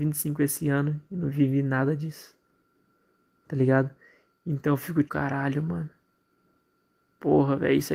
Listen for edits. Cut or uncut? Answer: cut